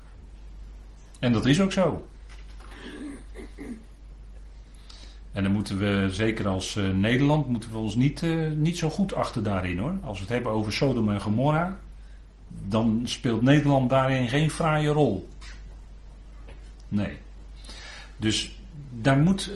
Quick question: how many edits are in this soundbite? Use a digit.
0